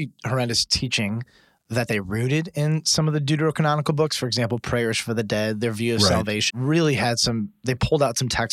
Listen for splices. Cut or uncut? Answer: cut